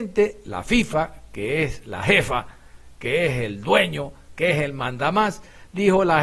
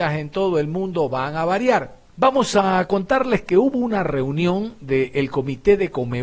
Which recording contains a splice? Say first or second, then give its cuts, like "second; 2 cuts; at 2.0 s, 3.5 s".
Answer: second; 1 cut; at 2.1 s